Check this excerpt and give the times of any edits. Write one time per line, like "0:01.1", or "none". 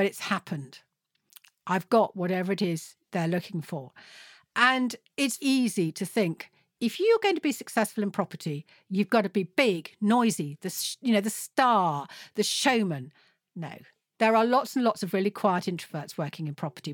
0:05.4